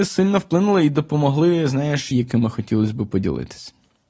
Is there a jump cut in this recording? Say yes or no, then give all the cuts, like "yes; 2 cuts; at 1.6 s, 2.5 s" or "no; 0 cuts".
yes; 1 cut; at 2.1 s